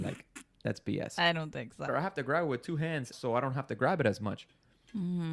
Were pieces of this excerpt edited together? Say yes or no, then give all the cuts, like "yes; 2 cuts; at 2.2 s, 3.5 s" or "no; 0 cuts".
yes; 2 cuts; at 1.9 s, 3.1 s